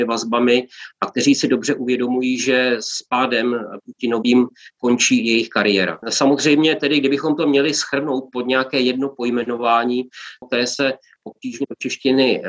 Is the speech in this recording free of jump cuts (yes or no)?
no